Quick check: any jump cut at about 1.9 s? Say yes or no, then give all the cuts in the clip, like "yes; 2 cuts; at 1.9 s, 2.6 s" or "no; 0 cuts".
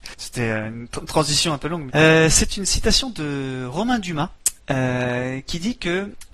yes; 1 cut; at 1.9 s